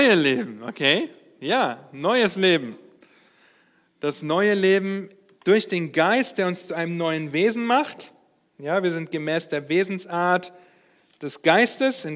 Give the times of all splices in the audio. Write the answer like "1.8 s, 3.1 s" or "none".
none